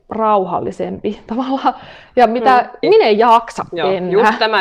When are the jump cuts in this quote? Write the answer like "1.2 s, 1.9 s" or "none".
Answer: 2.8 s

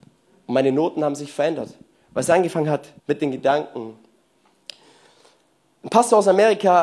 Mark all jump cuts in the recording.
3.0 s

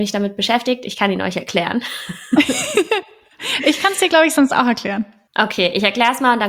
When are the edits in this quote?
none

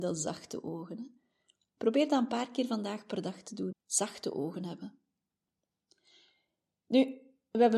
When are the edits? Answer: 3.7 s

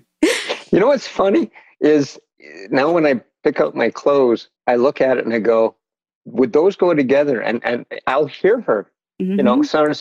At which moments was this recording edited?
4.6 s

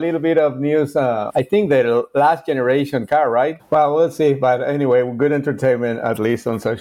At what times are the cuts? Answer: 1.3 s, 3.6 s

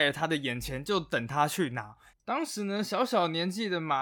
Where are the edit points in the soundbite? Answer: 2.1 s

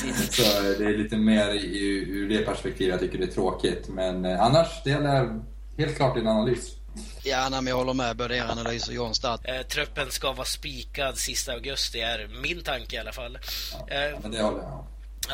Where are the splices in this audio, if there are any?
7.2 s, 9.4 s

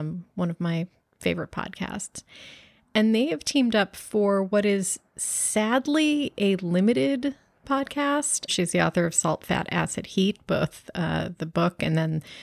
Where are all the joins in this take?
8.5 s

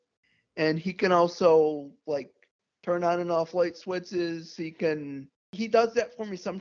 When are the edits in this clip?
none

